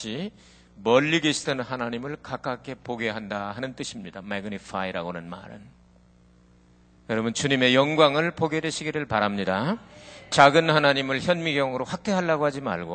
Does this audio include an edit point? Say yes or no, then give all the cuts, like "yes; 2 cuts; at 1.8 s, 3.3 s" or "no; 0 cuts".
no; 0 cuts